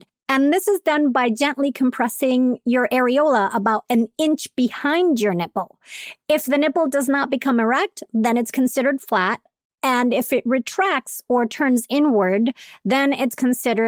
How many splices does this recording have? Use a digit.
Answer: 0